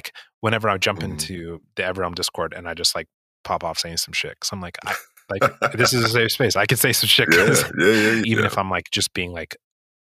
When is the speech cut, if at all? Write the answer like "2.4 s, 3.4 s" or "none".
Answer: 8.2 s